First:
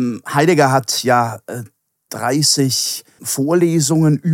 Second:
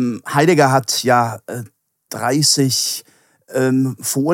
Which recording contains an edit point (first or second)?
first